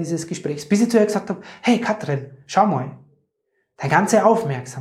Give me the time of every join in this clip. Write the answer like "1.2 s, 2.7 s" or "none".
none